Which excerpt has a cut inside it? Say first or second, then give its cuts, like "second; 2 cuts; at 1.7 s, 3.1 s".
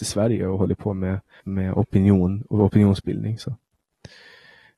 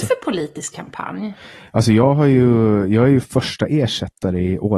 first; 1 cut; at 1.4 s